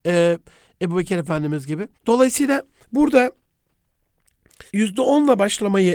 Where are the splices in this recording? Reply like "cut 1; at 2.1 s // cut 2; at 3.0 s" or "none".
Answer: cut 1; at 1.9 s // cut 2; at 4.7 s